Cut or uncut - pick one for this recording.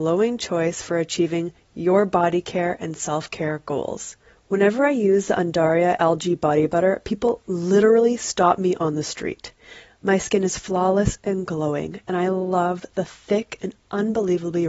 uncut